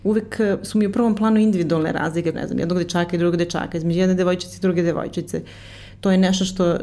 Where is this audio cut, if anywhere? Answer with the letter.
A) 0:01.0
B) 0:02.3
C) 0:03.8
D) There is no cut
B